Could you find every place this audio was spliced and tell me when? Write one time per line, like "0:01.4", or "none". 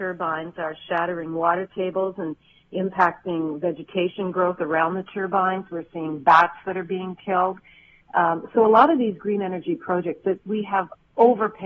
none